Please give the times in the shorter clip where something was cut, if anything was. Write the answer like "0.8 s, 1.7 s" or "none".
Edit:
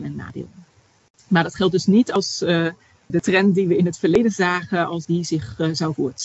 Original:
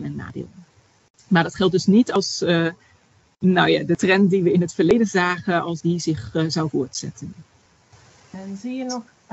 3.1 s